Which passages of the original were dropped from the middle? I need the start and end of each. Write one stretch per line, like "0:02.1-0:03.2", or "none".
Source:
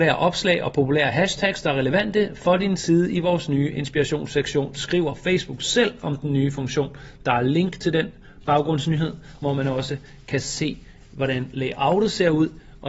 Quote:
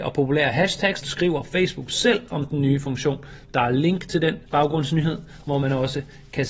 0:01.6-0:04.7
0:08.2-0:08.4